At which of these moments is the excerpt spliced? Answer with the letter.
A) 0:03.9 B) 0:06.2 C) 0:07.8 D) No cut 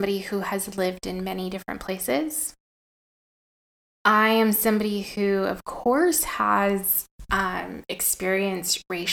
D